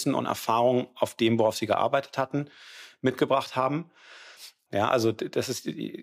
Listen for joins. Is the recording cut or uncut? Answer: cut